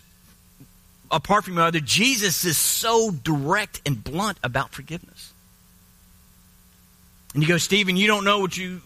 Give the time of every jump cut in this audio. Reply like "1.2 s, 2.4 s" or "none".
none